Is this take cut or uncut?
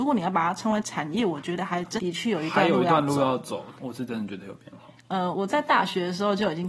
cut